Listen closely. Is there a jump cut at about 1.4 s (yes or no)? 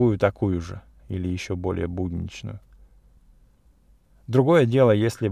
no